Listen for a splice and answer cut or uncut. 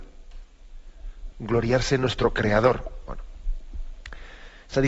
cut